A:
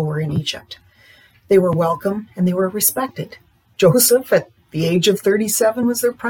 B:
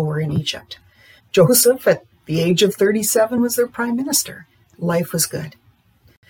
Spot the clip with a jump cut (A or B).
B